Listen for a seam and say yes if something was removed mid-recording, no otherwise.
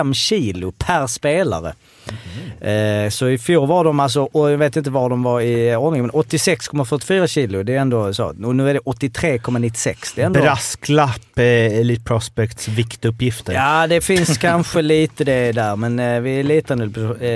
no